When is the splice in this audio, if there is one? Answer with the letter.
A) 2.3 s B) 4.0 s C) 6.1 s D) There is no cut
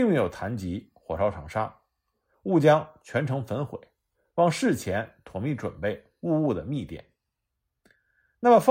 A